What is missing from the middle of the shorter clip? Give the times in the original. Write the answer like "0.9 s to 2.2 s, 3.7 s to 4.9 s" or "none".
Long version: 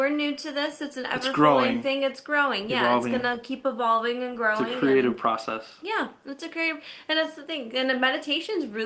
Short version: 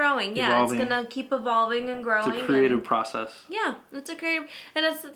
none